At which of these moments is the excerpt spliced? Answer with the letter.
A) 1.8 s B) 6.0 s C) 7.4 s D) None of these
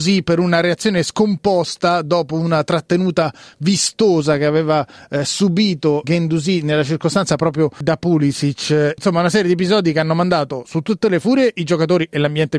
B